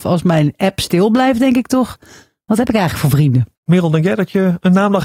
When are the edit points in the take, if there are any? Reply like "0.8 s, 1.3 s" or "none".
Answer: 3.5 s